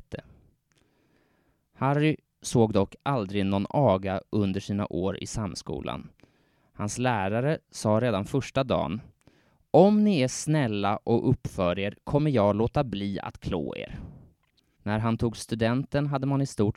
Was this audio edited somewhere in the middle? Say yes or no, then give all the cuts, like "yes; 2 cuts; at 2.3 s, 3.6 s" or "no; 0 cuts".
yes; 1 cut; at 14.8 s